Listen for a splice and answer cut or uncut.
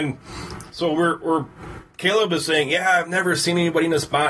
uncut